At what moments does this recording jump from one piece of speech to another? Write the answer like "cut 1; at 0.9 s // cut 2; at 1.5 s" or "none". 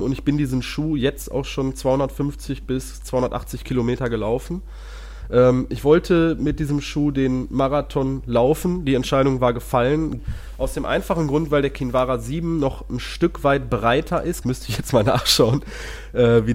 cut 1; at 10.2 s // cut 2; at 14.4 s